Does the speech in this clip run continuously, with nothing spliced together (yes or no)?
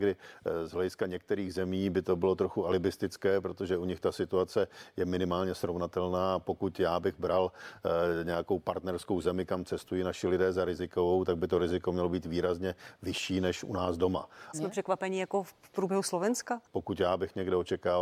no